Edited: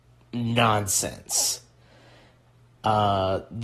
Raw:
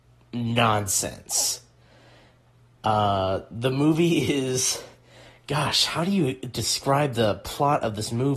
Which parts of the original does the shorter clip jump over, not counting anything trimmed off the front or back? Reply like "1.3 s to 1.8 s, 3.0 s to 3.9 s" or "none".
none